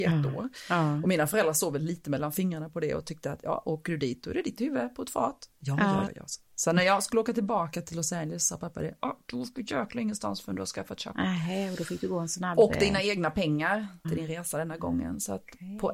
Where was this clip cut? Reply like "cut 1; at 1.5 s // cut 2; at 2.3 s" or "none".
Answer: cut 1; at 6.1 s // cut 2; at 14.0 s